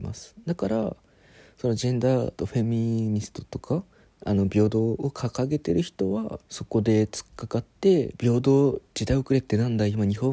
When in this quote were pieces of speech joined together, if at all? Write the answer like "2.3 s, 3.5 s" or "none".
2.4 s, 6.4 s